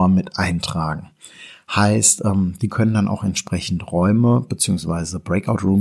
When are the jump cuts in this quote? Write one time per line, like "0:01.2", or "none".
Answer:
none